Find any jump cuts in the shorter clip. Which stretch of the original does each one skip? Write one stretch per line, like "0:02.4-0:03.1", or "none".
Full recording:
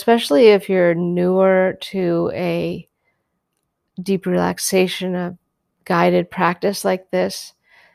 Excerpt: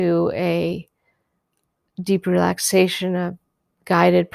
none